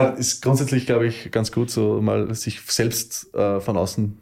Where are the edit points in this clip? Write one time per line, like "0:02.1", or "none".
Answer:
none